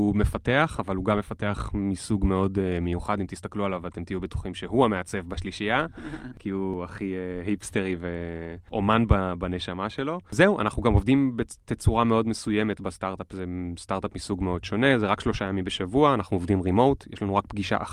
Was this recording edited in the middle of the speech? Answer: no; 0 cuts

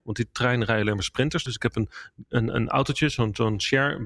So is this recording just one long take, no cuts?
no; 1 cut; at 1.5 s

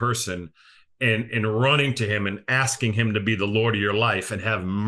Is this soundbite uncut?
no; 1 cut; at 1.3 s

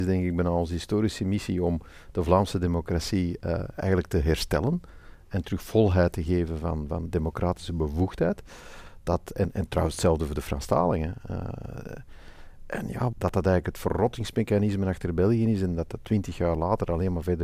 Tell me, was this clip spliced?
yes; 1 cut; at 13.1 s

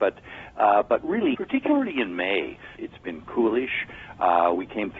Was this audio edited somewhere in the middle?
yes; 2 cuts; at 1.3 s, 2.8 s

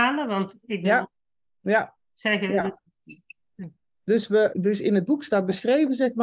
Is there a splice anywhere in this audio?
yes; 1 cut; at 4.5 s

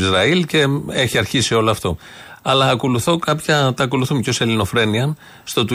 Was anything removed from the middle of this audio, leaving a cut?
no; 0 cuts

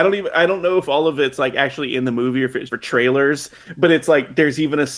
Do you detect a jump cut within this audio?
yes; 1 cut; at 2.7 s

